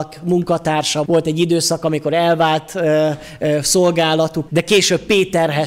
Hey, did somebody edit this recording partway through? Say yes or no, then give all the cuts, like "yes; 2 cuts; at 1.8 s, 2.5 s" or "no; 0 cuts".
yes; 2 cuts; at 1.1 s, 4.5 s